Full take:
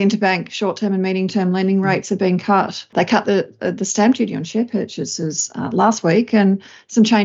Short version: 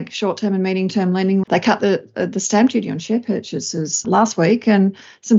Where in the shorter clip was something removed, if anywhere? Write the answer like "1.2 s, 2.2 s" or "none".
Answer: 1.4 s, 4.0 s